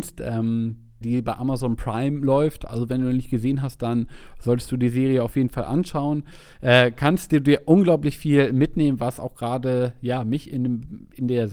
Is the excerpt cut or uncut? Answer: cut